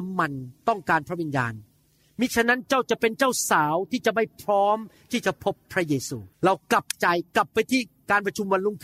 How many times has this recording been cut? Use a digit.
1